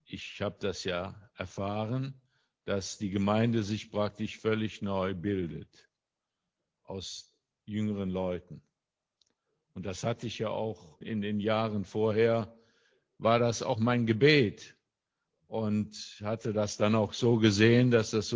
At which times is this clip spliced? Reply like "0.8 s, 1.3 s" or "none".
11.0 s